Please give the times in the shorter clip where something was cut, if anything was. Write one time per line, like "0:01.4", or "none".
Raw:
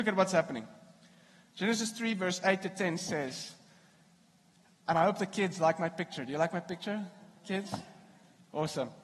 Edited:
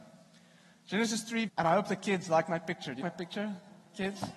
0:01.5
0:03.0